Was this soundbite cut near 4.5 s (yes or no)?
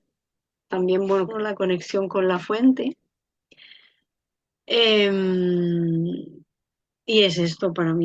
no